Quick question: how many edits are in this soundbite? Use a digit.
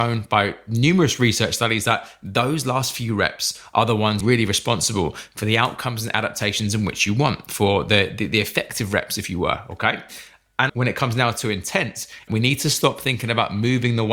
3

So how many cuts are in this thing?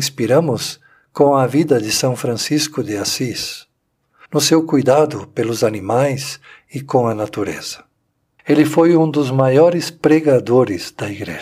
2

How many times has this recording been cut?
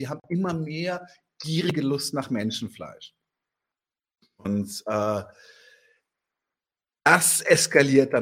0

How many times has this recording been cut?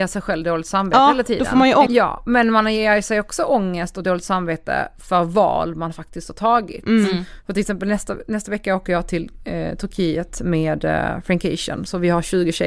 1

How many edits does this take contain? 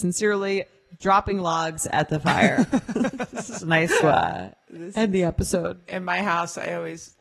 2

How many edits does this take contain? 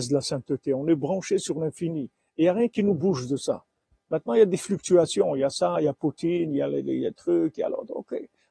0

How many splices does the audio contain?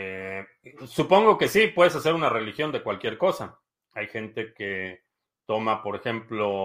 0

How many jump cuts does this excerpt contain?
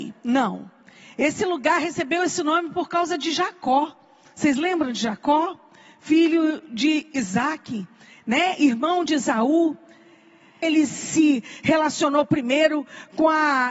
1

